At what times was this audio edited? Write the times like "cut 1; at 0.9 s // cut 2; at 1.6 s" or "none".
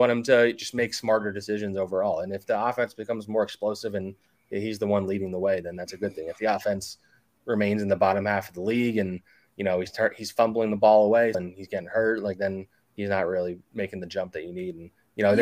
cut 1; at 11.3 s